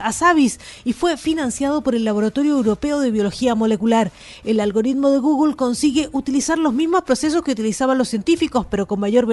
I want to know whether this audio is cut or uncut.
uncut